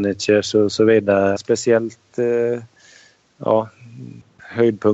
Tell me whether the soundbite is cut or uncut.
cut